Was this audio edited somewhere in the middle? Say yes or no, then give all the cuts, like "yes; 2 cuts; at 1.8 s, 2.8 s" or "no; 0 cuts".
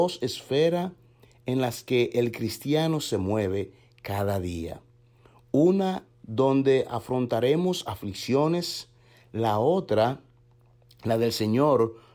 yes; 1 cut; at 6.1 s